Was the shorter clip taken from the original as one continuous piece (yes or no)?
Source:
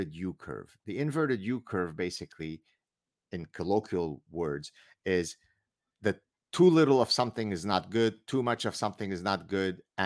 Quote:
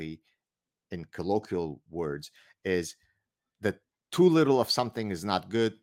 yes